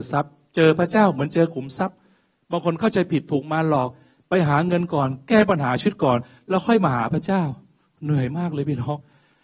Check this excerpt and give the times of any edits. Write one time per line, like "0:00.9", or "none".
none